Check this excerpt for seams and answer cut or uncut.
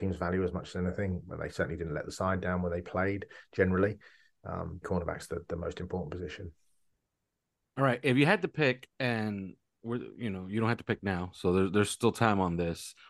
cut